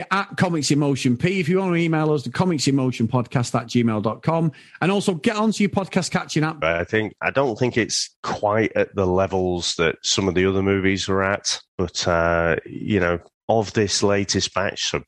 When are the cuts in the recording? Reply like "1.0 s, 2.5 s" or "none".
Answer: 6.6 s